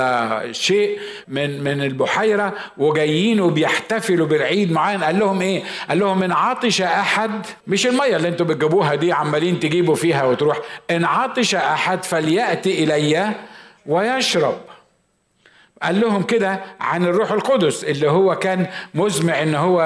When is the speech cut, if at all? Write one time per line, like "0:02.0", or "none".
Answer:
0:01.2
0:07.6